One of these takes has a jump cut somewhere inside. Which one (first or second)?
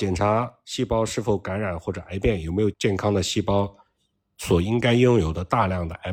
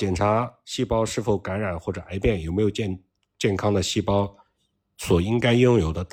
first